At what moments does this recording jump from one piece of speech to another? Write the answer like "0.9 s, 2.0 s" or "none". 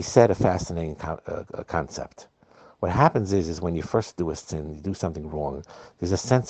none